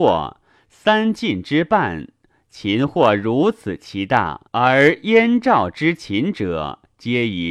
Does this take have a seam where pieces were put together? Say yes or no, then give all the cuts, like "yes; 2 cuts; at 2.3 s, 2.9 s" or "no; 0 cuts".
yes; 1 cut; at 4.5 s